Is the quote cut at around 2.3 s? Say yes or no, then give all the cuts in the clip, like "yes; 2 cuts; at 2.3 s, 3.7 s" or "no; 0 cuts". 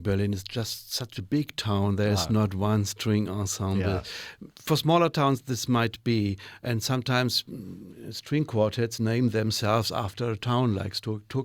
no; 0 cuts